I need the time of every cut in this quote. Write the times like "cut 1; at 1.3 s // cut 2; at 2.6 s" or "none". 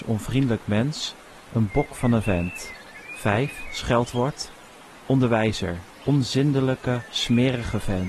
cut 1; at 5.9 s